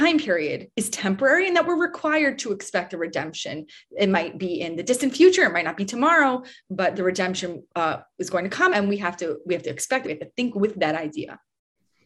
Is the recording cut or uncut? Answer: cut